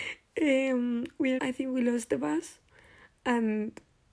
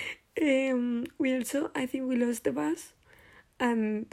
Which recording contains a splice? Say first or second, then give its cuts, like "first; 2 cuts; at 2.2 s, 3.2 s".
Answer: first; 1 cut; at 1.4 s